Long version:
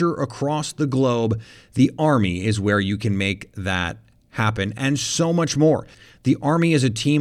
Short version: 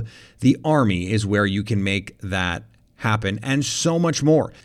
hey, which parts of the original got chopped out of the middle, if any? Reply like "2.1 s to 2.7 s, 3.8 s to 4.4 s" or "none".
none